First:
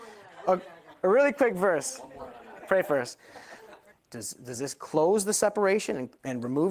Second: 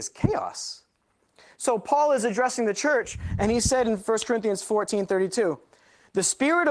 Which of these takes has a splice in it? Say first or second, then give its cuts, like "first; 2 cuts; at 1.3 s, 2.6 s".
first; 2 cuts; at 2.6 s, 3.9 s